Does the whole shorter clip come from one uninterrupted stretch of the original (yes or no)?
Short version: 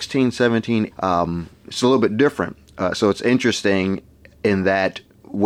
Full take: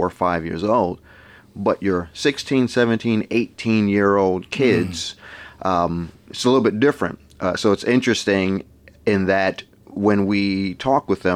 no